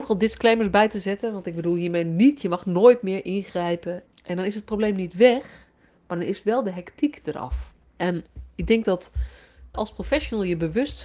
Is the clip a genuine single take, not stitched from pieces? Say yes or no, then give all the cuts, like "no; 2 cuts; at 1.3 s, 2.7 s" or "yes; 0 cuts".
no; 3 cuts; at 4.1 s, 8.0 s, 9.7 s